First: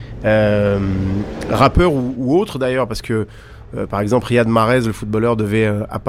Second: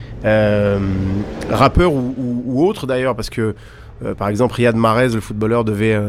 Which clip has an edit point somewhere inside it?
first; 1 cut; at 2.1 s

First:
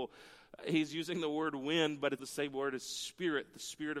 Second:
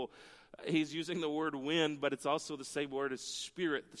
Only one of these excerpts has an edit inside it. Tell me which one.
first; 1 cut; at 2.2 s

